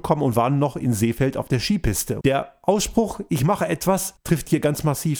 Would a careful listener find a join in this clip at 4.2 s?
yes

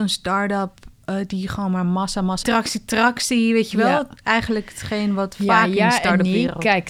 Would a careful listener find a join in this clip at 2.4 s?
yes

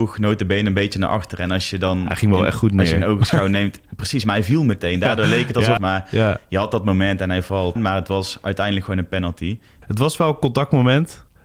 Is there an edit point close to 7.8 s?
yes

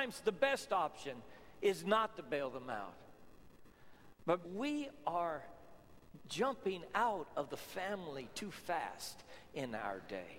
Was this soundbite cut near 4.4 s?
yes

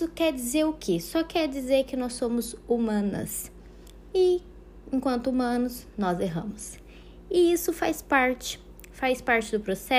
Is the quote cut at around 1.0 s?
no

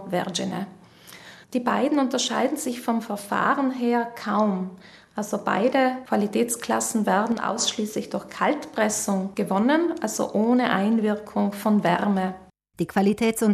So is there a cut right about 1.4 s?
yes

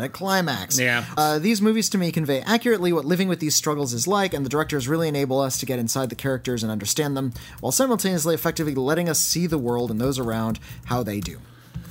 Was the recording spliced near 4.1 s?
no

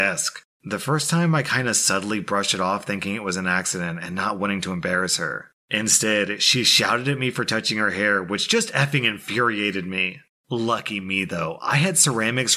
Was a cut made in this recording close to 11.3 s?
no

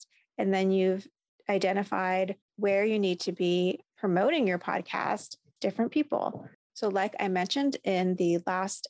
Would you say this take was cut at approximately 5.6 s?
yes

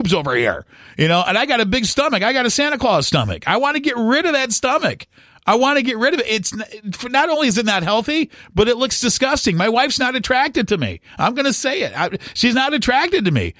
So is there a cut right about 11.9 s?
no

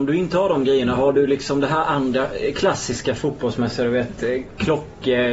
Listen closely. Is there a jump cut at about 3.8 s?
no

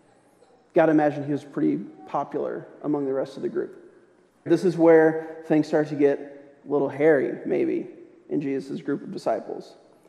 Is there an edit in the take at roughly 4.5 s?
yes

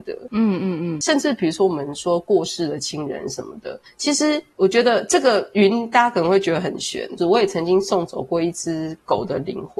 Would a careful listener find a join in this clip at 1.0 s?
no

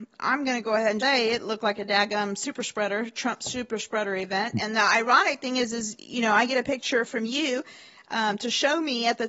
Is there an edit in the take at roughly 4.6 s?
no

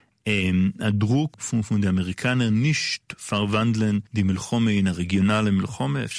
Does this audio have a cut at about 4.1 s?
yes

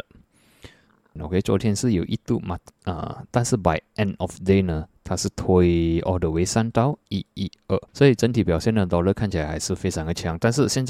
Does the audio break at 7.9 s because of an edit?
yes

